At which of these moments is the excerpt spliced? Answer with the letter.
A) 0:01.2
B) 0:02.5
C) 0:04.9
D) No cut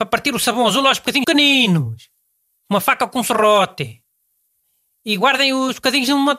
A